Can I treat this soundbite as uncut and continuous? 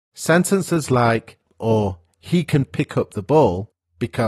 no; 1 cut; at 1.5 s

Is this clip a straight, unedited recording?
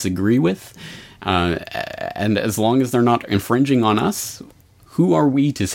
yes; 0 cuts

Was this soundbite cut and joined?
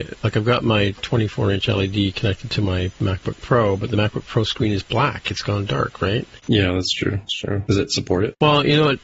yes; 2 cuts; at 6.4 s, 7.7 s

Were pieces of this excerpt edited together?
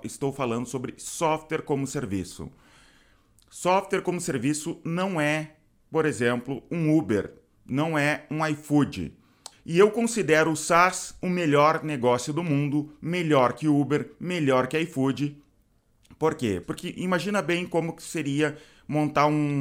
yes; 2 cuts; at 9.5 s, 16.6 s

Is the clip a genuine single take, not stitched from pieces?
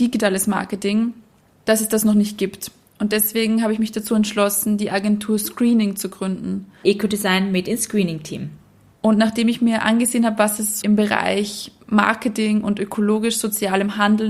no; 3 cuts; at 6.8 s, 8.9 s, 10.8 s

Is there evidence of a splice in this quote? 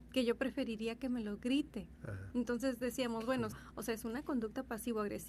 yes; 2 cuts; at 2.3 s, 3.5 s

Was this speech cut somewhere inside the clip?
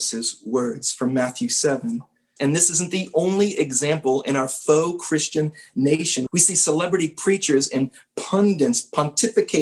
yes; 2 cuts; at 2.4 s, 6.3 s

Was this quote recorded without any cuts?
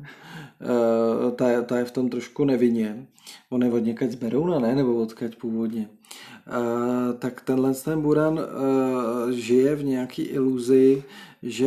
yes; 0 cuts

